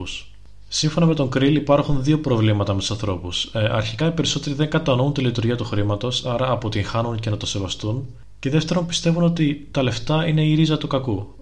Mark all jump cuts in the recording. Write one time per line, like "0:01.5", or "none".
none